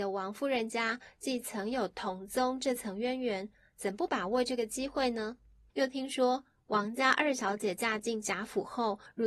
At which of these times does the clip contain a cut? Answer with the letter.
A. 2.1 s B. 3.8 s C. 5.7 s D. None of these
C